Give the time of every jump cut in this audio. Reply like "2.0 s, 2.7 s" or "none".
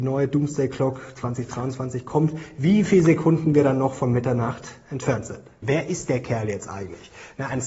5.6 s